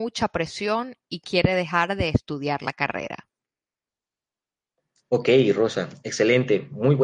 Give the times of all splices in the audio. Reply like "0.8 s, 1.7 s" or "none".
none